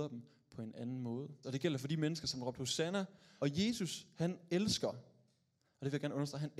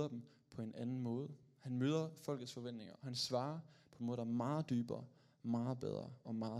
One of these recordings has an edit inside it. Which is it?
first; 2 cuts; at 1.4 s, 3.4 s

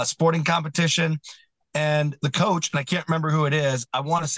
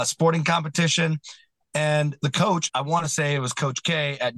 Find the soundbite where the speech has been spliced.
second; 1 cut; at 2.7 s

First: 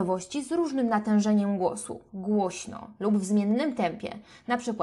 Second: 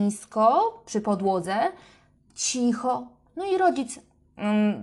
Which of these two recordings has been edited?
first; 1 cut; at 2.1 s

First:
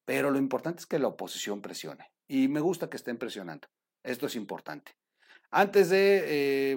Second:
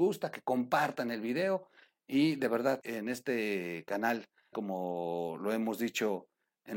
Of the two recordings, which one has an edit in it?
second; 2 cuts; at 2.8 s, 4.5 s

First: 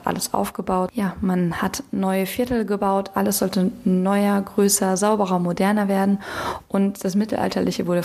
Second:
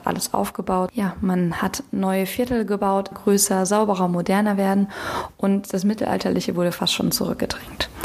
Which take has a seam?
second; 1 cut; at 3.1 s

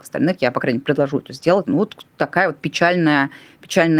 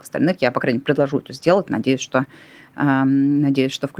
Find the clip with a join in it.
first; 1 cut; at 1.6 s

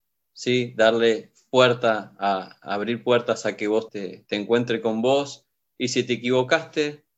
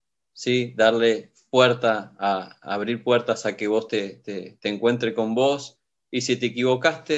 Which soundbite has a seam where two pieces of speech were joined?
first; 1 cut; at 3.9 s

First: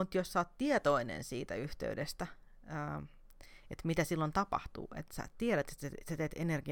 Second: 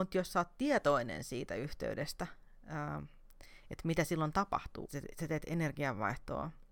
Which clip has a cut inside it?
second; 1 cut; at 4.9 s

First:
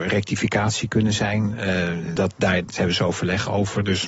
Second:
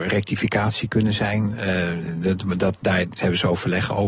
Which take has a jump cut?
first; 1 cut; at 2.2 s

